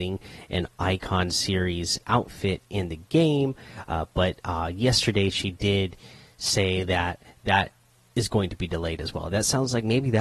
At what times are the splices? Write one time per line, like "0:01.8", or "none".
none